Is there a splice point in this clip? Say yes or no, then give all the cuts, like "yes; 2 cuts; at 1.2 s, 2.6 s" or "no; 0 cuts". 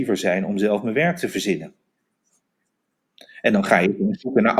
no; 0 cuts